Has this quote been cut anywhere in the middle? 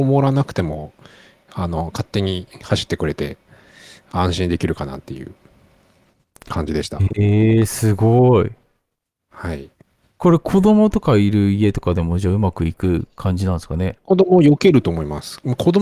no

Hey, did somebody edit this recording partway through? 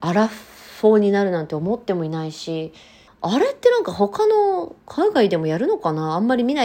yes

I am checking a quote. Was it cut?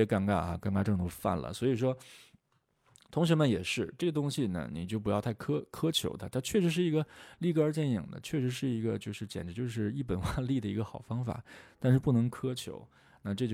no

